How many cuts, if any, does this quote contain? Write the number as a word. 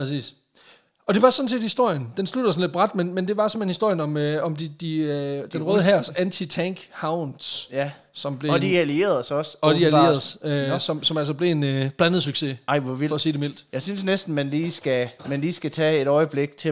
zero